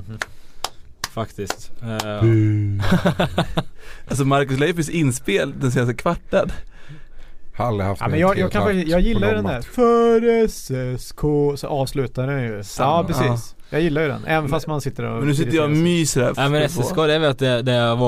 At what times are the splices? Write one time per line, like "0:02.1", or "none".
0:12.8
0:16.3